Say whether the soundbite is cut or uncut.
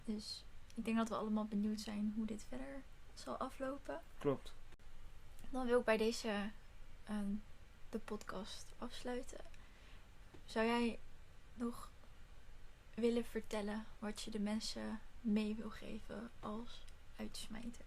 uncut